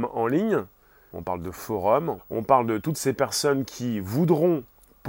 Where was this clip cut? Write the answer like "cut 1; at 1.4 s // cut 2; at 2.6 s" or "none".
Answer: cut 1; at 1.1 s // cut 2; at 2.2 s